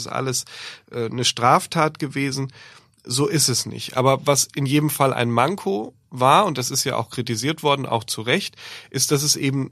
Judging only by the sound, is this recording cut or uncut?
uncut